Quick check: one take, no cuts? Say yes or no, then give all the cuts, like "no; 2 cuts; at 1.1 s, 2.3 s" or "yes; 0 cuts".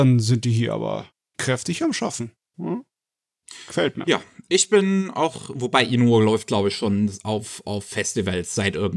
yes; 0 cuts